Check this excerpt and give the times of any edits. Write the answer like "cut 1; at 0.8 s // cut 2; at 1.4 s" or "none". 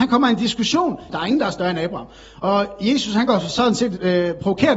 cut 1; at 1.1 s